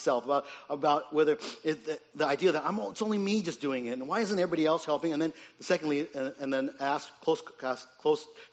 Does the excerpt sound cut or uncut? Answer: uncut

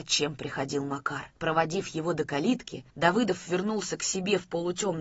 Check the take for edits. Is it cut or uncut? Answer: cut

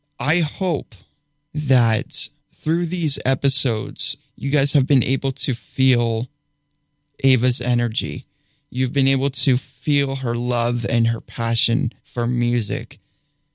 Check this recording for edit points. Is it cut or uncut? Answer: cut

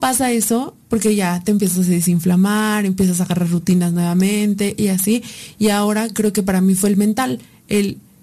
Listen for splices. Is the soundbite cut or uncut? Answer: uncut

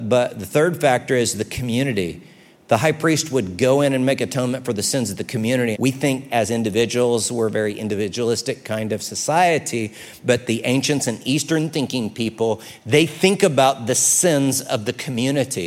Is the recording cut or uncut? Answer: cut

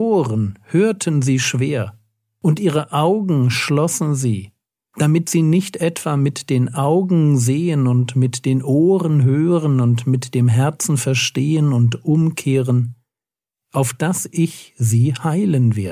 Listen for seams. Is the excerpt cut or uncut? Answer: uncut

